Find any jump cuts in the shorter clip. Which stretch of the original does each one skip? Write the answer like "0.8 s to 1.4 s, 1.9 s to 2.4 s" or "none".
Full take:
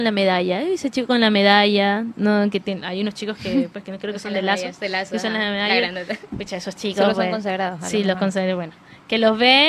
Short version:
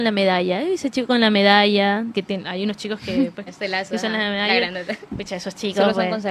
2.1 s to 2.5 s, 3.8 s to 4.7 s